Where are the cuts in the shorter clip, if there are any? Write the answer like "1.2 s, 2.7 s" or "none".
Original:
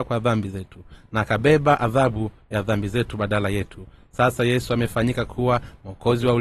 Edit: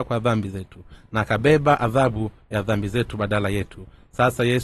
none